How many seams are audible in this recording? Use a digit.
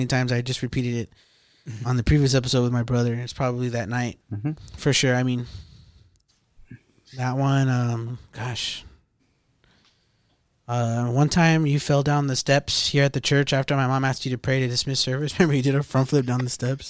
0